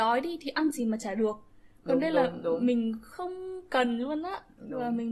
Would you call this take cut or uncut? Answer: uncut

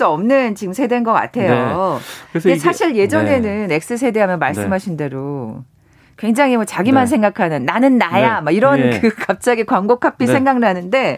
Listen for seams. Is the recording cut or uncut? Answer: uncut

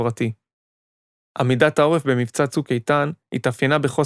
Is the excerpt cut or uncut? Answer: uncut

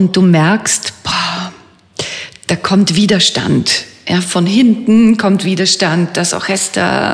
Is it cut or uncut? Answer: uncut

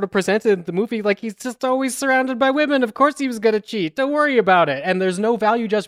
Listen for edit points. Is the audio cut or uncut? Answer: uncut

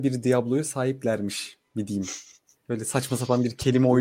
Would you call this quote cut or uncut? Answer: uncut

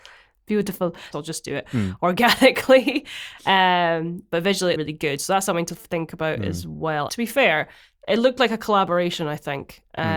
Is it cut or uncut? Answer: cut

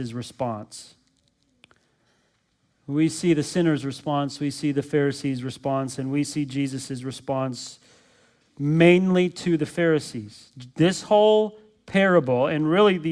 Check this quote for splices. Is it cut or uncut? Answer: uncut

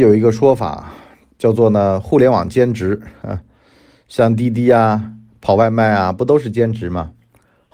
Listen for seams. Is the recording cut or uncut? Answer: uncut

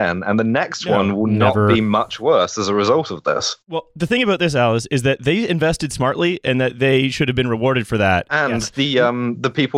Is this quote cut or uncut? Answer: cut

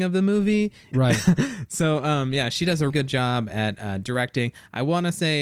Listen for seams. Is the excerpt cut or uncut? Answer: cut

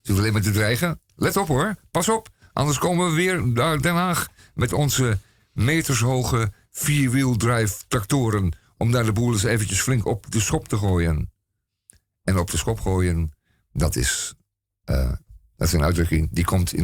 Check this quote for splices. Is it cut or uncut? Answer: uncut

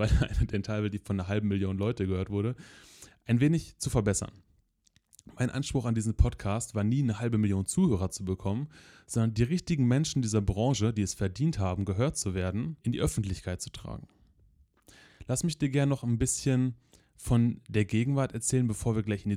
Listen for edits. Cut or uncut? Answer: cut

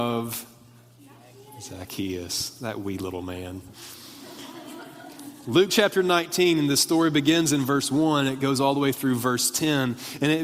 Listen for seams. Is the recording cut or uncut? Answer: uncut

